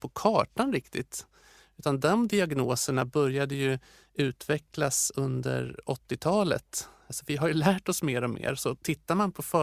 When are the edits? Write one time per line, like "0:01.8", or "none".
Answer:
none